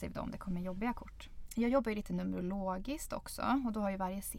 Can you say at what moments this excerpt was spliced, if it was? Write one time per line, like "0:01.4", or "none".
0:01.5